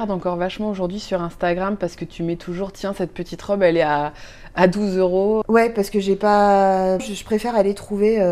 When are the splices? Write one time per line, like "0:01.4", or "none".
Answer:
0:05.4
0:07.0